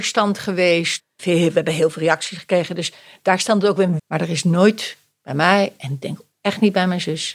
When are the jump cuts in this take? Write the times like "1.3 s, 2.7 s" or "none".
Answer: 1.0 s, 4.0 s

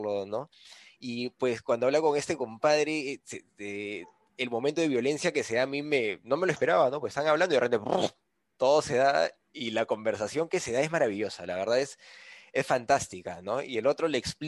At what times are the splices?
none

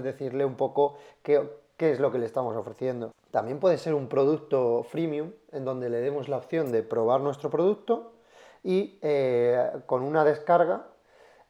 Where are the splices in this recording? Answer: none

